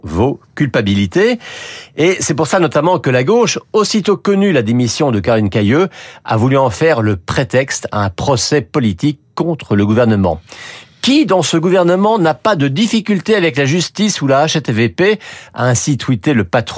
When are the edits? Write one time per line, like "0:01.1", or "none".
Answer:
none